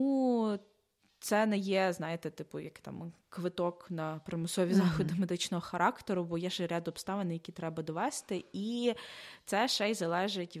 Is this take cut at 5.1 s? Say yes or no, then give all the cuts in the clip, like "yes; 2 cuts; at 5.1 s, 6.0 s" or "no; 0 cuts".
no; 0 cuts